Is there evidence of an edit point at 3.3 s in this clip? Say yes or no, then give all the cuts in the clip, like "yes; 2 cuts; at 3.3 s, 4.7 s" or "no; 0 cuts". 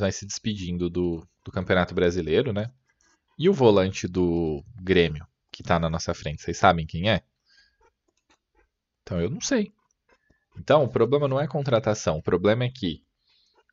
yes; 1 cut; at 3.3 s